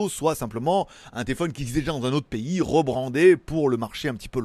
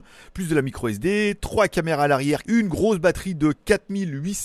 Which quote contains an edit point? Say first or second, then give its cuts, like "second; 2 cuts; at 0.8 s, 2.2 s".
second; 1 cut; at 2.4 s